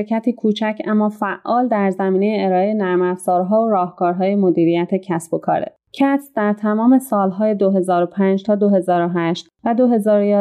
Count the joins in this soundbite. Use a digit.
1